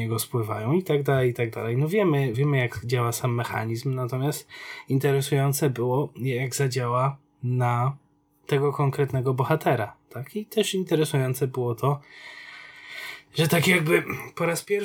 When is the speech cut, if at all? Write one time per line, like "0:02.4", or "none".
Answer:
0:02.3